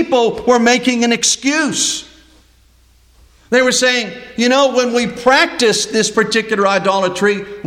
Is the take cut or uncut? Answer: uncut